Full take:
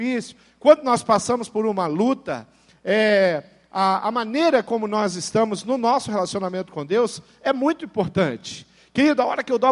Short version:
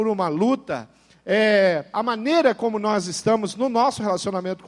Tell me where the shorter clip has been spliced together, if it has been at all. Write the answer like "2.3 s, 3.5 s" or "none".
1.9 s